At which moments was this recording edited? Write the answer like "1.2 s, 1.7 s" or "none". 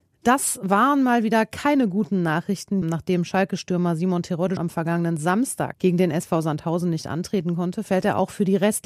2.8 s, 4.6 s